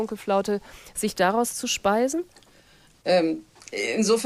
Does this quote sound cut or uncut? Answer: cut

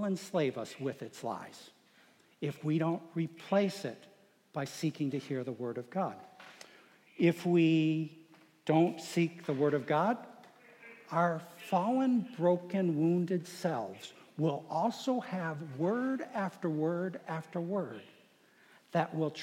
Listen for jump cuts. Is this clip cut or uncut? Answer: uncut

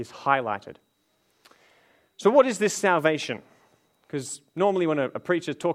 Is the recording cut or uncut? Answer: uncut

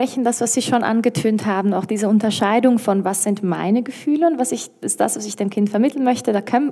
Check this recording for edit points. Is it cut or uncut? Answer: uncut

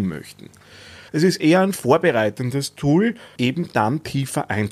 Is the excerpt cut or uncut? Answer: cut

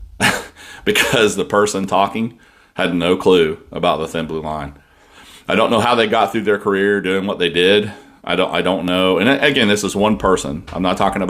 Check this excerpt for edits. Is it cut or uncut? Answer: uncut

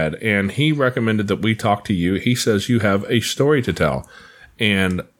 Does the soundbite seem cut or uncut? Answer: uncut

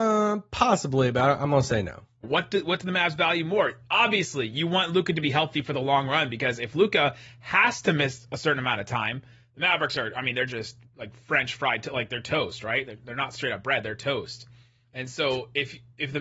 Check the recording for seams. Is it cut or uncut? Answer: cut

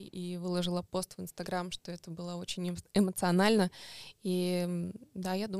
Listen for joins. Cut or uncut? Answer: uncut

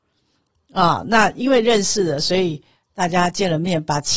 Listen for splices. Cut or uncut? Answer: uncut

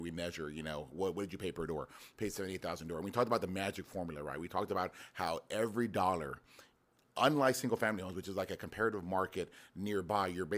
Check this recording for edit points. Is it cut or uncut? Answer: uncut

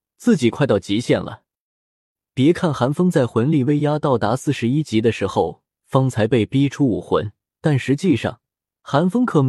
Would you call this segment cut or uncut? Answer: cut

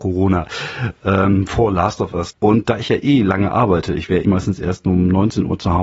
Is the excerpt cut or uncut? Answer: cut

